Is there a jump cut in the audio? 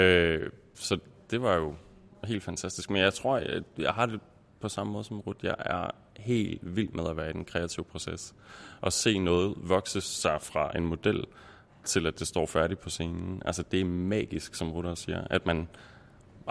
no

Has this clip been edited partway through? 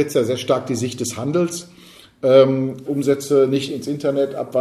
yes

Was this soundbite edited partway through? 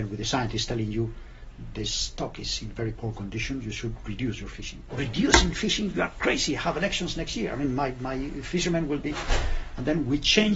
yes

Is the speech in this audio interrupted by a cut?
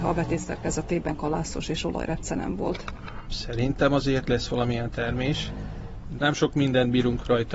yes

